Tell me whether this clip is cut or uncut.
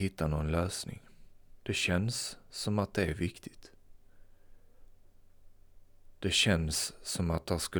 cut